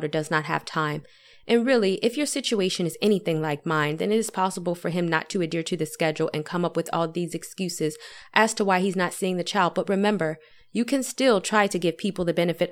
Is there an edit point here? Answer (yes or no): no